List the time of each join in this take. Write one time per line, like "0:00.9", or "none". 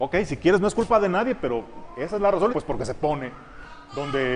0:02.5

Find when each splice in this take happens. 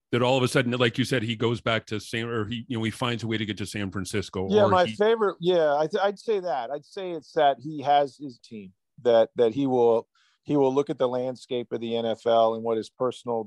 0:08.4

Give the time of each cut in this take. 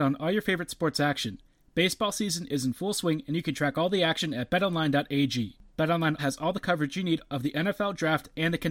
0:06.2

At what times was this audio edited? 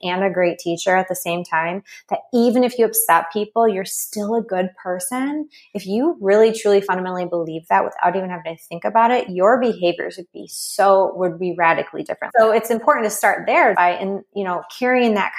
0:12.3
0:13.7

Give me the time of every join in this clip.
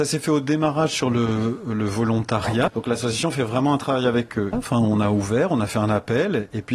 0:02.7
0:04.5

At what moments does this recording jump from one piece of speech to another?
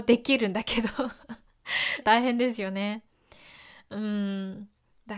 0:02.0

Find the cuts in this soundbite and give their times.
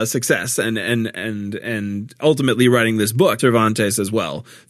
0:03.4

